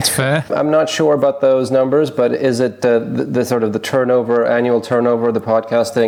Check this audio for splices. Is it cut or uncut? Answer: uncut